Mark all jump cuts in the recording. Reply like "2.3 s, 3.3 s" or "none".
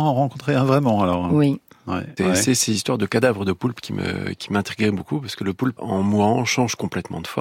2.2 s, 5.8 s